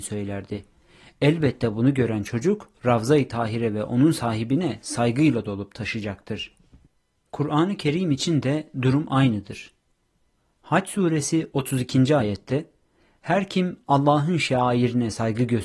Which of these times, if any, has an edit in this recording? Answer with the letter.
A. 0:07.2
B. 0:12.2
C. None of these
C